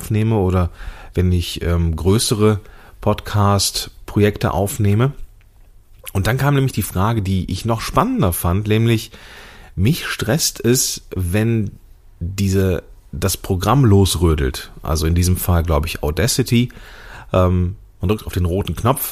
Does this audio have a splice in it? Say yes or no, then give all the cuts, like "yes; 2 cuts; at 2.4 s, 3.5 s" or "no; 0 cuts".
no; 0 cuts